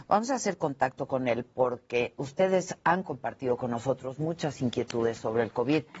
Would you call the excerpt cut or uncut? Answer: uncut